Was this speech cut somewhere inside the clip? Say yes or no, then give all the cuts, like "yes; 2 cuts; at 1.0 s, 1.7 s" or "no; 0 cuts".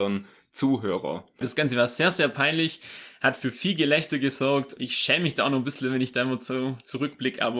yes; 1 cut; at 1.4 s